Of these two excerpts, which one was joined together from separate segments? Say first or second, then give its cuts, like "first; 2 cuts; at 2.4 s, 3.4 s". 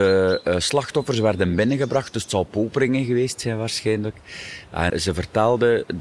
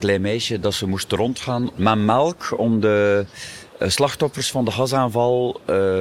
first; 1 cut; at 4.9 s